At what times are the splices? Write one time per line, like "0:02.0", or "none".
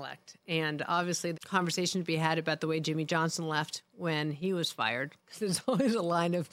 0:01.3